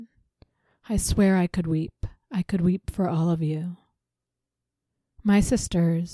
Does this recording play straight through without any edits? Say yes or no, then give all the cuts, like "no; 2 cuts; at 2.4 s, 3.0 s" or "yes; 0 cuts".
yes; 0 cuts